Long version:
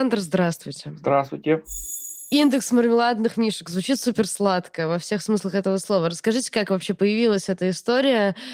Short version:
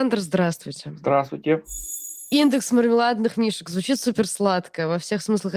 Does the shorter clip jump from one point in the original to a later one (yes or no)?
no